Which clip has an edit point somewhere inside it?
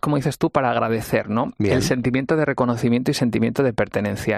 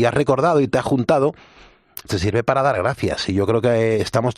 second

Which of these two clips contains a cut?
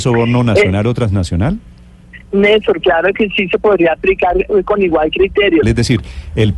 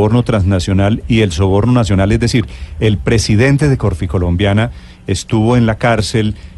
first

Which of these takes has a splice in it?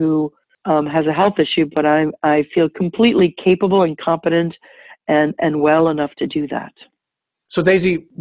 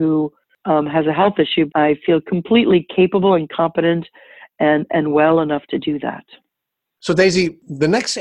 second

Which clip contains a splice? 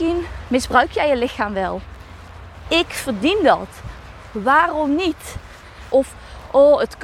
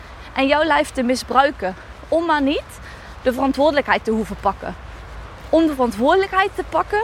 first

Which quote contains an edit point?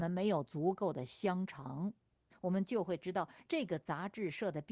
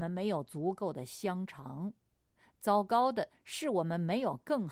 first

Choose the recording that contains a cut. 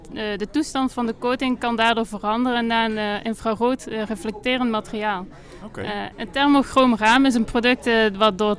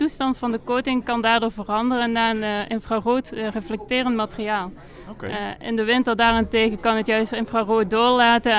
first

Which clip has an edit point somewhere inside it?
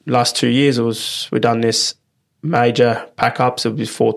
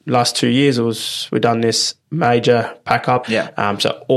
second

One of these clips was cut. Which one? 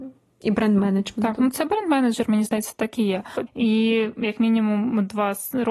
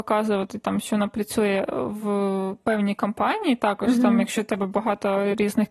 first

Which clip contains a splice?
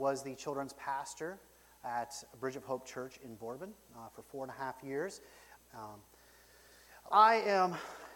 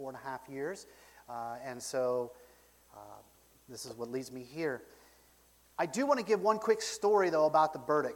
first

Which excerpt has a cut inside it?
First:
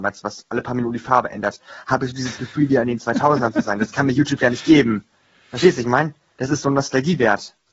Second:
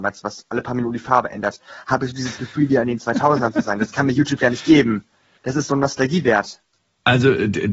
second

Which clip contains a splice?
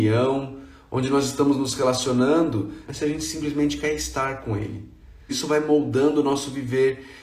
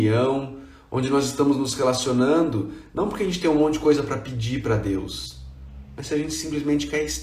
first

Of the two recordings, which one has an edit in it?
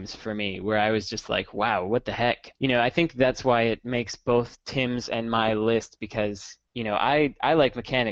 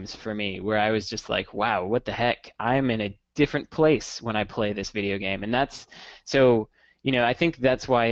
first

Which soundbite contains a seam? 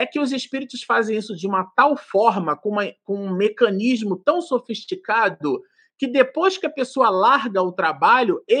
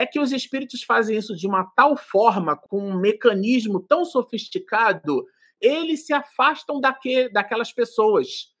second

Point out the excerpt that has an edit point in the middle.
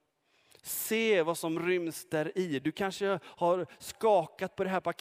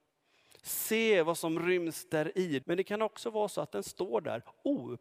second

